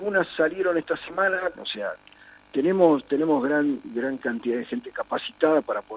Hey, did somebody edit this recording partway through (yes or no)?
yes